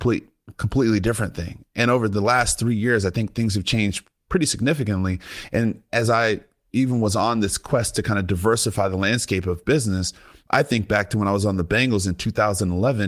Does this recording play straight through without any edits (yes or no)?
yes